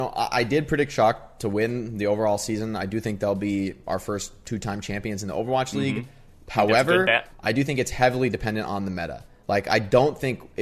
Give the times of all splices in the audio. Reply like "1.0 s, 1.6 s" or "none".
none